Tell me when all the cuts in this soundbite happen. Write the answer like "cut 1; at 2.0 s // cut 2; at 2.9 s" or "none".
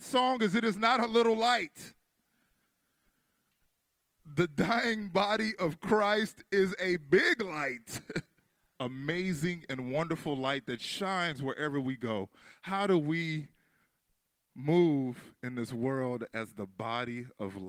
cut 1; at 8.7 s